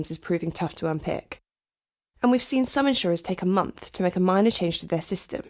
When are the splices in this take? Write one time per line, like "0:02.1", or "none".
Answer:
none